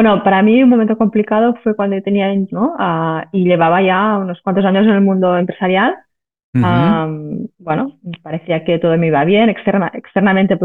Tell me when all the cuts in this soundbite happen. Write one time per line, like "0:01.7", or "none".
0:02.5